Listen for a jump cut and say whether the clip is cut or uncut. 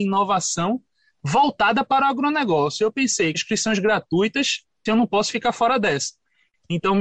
cut